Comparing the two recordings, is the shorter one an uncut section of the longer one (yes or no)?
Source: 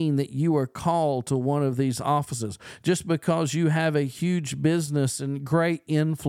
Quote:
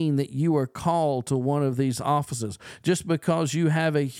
yes